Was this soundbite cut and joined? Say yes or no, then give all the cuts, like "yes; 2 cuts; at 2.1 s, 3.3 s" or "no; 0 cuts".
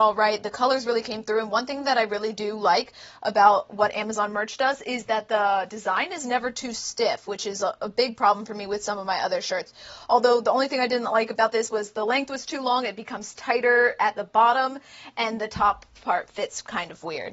no; 0 cuts